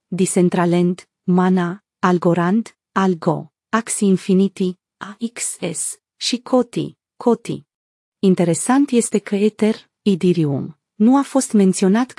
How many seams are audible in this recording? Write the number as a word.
one